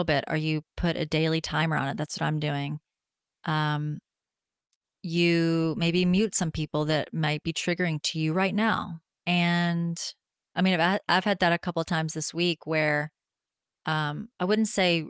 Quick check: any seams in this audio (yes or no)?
yes